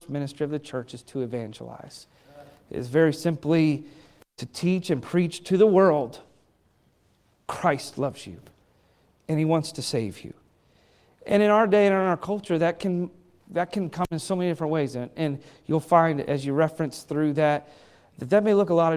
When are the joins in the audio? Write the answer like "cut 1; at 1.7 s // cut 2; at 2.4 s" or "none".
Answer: none